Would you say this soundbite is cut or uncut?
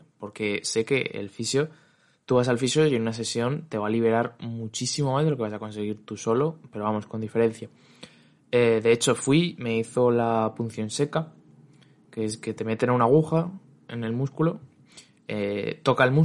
uncut